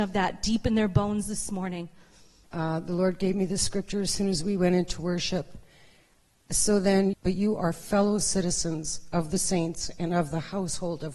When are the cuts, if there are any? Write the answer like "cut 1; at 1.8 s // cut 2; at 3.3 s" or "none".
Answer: cut 1; at 2.5 s // cut 2; at 7.1 s